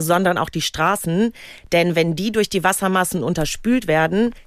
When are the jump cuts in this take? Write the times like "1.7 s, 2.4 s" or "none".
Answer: none